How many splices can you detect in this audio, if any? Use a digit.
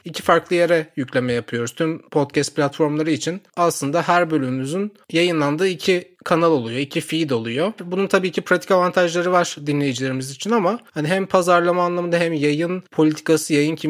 1